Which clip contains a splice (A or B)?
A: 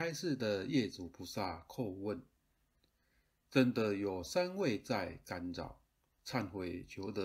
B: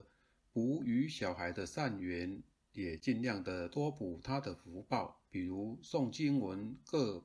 B